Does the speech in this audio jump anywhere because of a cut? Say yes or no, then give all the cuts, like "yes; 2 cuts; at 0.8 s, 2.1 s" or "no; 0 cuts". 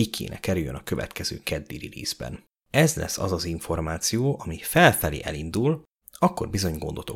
yes; 2 cuts; at 2.6 s, 6.0 s